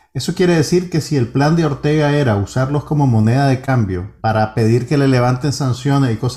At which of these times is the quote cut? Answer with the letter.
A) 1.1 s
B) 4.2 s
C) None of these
B